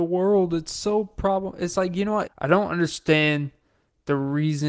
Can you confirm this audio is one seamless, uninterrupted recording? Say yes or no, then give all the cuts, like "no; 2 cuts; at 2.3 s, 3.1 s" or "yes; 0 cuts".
no; 1 cut; at 2.3 s